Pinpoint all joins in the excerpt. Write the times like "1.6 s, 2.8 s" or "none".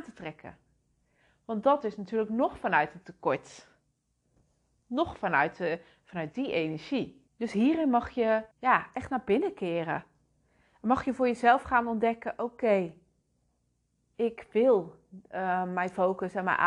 7.3 s, 8.5 s